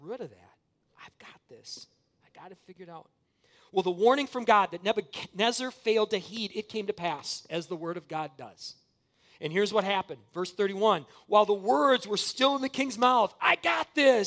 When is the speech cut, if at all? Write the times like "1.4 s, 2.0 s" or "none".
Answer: none